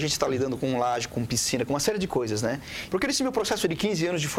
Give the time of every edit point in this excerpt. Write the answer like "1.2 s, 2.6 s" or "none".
1.1 s, 2.9 s